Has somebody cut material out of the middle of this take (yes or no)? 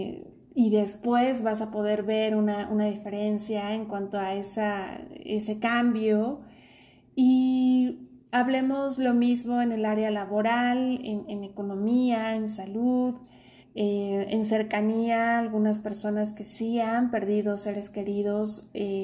yes